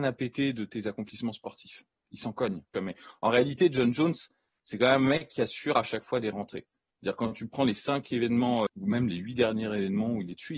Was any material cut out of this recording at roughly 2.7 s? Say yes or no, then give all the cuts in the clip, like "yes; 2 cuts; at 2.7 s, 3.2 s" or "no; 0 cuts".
yes; 2 cuts; at 2.7 s, 8.7 s